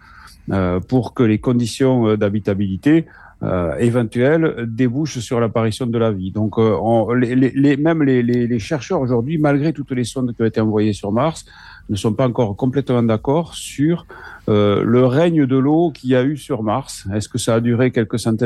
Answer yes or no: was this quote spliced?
no